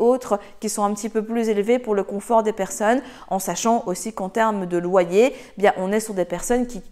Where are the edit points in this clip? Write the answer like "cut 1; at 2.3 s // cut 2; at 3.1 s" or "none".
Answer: none

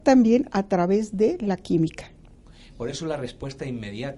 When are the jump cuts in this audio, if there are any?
none

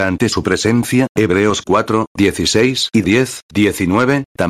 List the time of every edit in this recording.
none

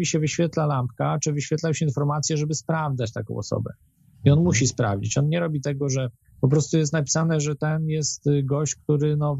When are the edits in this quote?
none

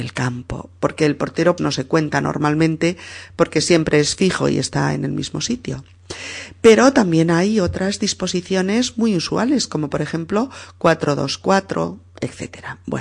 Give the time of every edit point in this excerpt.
cut 1; at 1.6 s

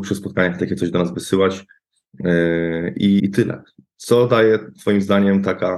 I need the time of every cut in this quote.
cut 1; at 3.2 s

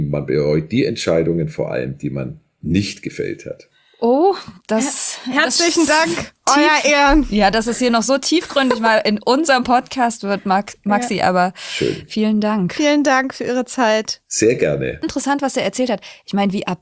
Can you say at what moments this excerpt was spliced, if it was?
cut 1; at 15.0 s

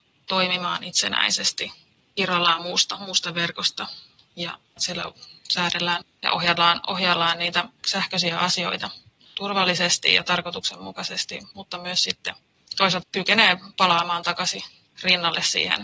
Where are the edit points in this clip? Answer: none

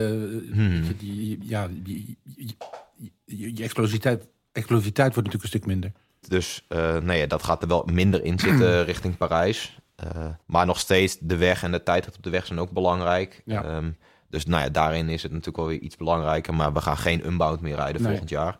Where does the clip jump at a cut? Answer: cut 1; at 6.2 s // cut 2; at 10.4 s

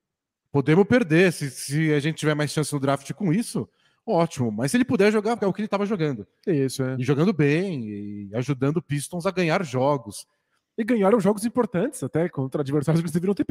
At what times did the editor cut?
cut 1; at 5.4 s

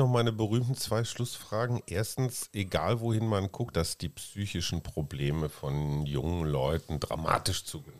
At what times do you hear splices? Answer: cut 1; at 3.7 s

